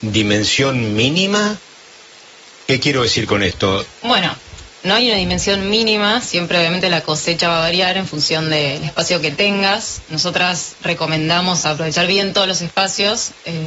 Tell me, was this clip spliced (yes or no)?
yes